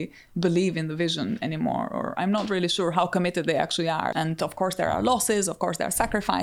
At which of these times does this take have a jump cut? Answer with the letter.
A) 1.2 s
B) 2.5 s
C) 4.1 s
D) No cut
C